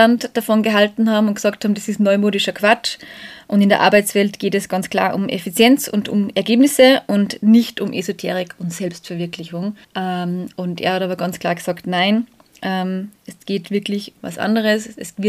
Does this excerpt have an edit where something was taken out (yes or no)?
yes